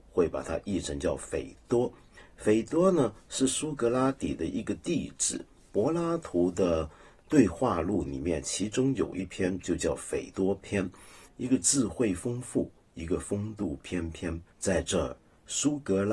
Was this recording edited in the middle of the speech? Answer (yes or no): yes